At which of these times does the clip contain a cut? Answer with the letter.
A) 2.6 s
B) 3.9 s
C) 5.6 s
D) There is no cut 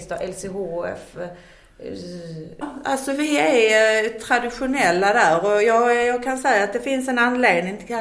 A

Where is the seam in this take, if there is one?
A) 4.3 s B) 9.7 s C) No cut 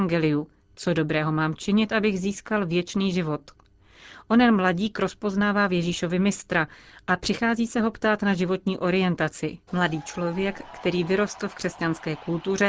B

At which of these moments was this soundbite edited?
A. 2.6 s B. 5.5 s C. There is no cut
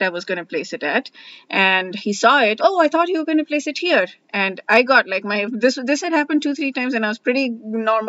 A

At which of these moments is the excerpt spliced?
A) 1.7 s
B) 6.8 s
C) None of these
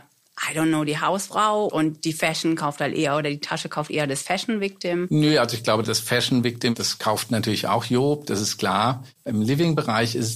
A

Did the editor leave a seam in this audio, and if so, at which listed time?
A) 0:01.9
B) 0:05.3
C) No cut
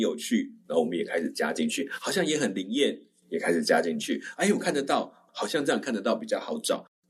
B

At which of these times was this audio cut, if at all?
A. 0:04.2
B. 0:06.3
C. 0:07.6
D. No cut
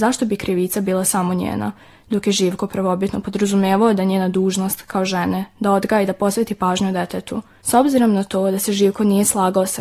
C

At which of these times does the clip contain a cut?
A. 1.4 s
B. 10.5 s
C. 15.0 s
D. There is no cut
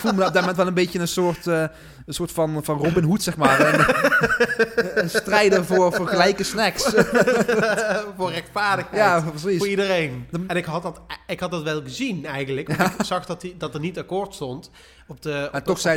B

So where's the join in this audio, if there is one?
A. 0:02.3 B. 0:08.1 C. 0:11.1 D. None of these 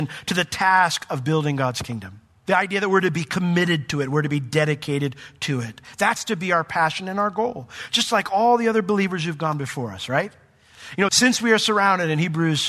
C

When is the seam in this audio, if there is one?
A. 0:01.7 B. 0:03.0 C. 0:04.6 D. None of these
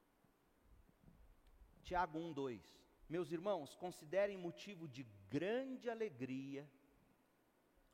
B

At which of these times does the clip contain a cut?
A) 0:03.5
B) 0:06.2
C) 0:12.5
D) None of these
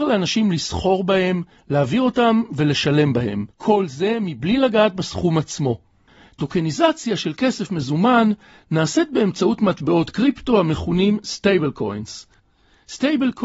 A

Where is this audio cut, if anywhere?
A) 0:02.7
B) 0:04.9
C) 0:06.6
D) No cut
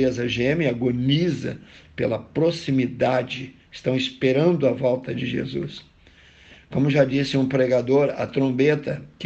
D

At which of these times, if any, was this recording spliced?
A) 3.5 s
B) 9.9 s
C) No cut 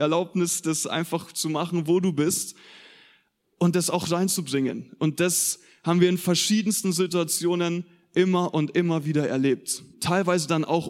B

